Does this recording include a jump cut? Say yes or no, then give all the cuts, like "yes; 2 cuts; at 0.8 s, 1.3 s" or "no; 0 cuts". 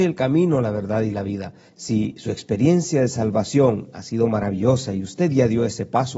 yes; 1 cut; at 1.7 s